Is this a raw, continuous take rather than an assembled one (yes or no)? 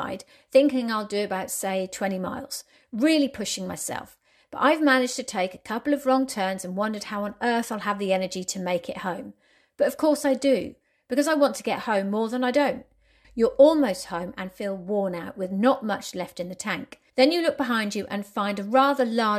no